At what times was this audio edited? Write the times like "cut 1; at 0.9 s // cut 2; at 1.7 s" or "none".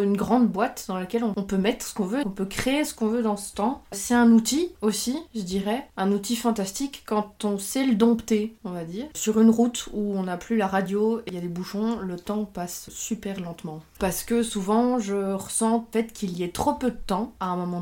cut 1; at 2.2 s // cut 2; at 9.1 s // cut 3; at 14.0 s

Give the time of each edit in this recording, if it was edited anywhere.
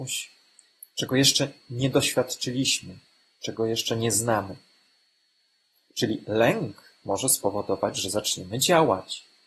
none

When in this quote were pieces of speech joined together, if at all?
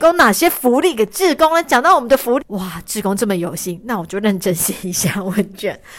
cut 1; at 2.4 s

